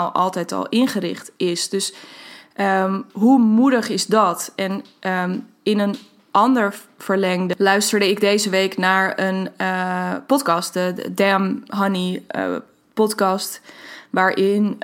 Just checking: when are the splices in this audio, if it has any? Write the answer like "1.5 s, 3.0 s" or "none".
none